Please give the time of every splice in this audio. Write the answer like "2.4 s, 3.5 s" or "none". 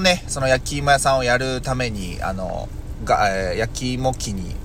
none